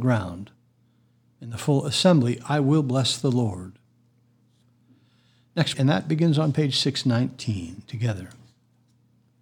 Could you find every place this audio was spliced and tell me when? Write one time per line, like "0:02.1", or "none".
0:05.7